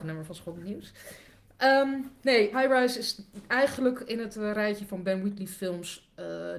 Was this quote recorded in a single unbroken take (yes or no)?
no